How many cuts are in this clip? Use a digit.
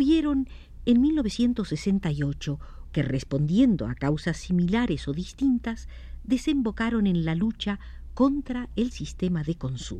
1